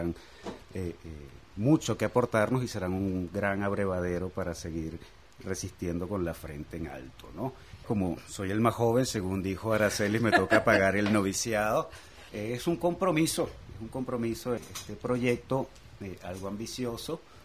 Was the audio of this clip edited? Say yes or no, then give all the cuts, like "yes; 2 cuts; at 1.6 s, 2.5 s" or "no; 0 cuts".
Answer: yes; 3 cuts; at 7.8 s, 12.3 s, 14.6 s